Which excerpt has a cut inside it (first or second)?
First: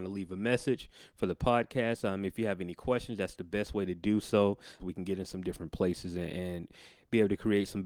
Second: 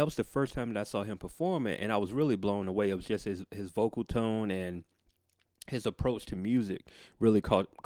first